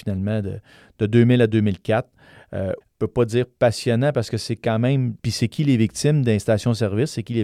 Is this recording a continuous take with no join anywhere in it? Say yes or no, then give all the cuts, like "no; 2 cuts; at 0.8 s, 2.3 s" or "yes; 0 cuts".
no; 2 cuts; at 2.8 s, 5.2 s